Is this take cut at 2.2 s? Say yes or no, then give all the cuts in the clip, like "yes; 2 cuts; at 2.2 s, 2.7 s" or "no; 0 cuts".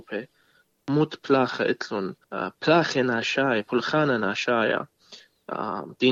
yes; 1 cut; at 2.2 s